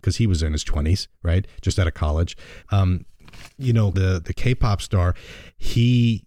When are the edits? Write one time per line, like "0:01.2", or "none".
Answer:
0:02.6
0:03.9